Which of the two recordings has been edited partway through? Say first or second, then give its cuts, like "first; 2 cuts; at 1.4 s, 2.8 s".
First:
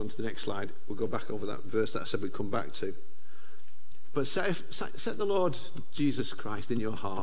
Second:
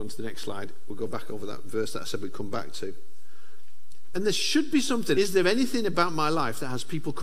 second; 2 cuts; at 4.1 s, 5.1 s